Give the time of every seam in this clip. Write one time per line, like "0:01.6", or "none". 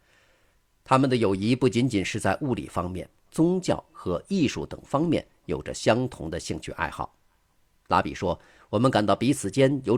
0:03.3